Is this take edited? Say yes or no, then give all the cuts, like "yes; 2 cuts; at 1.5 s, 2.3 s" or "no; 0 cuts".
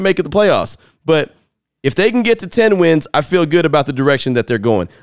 no; 0 cuts